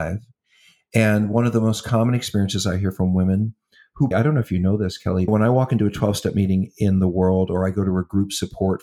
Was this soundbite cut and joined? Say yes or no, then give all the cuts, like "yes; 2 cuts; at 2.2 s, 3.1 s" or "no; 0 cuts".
yes; 2 cuts; at 4.1 s, 5.3 s